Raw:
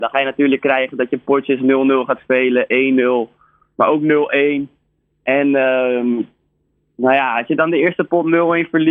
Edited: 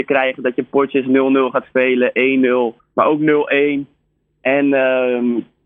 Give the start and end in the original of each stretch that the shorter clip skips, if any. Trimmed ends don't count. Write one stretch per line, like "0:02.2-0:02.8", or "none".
0:03.3-0:03.6